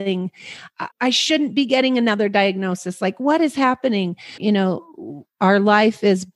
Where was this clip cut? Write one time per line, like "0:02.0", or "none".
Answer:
0:00.9
0:04.4